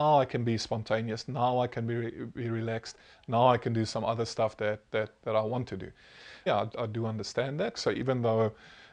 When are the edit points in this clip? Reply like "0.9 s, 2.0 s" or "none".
6.5 s, 7.7 s